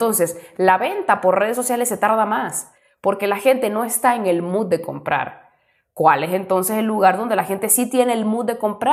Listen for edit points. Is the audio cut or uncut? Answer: uncut